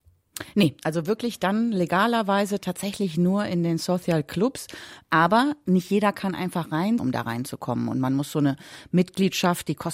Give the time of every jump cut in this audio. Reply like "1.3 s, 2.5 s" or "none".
5.0 s, 7.0 s